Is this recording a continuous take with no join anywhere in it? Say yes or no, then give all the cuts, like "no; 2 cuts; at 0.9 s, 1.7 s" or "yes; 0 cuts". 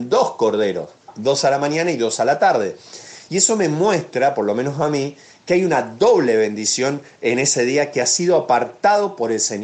yes; 0 cuts